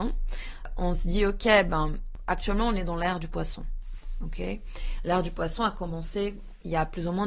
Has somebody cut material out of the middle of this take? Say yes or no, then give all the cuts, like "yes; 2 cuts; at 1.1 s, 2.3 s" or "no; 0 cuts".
no; 0 cuts